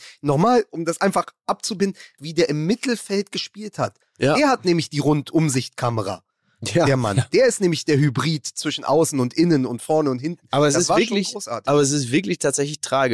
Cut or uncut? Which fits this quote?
cut